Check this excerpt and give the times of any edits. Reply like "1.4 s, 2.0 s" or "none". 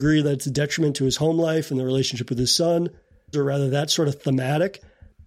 3.3 s